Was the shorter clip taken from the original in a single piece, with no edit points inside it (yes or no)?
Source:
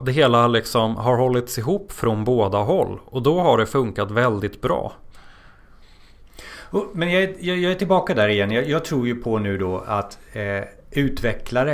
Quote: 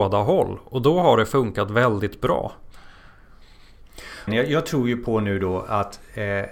no